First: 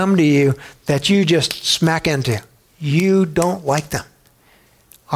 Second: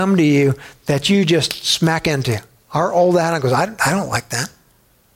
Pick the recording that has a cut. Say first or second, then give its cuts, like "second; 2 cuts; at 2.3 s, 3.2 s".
second; 1 cut; at 2.6 s